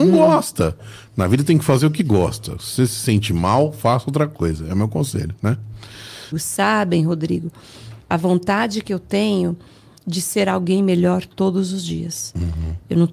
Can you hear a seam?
yes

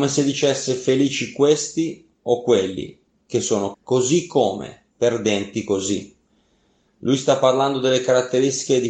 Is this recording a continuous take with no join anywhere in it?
no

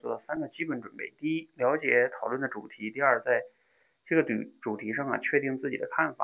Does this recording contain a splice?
no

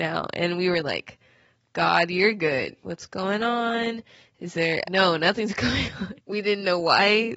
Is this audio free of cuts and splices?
no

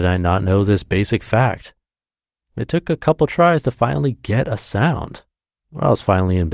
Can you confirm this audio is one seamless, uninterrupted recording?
no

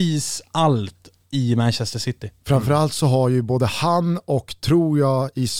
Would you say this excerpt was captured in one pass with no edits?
yes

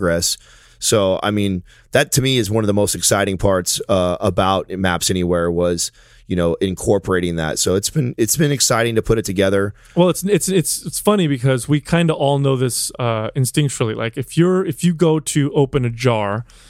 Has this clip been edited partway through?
no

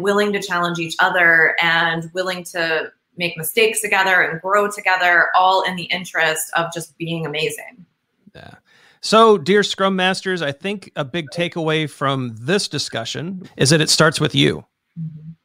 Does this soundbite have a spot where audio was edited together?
yes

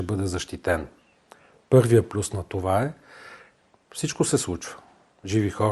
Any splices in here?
no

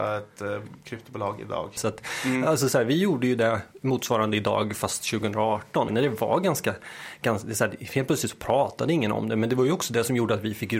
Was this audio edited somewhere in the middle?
yes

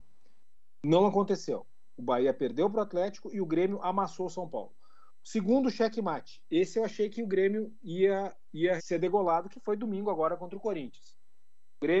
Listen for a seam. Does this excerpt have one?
yes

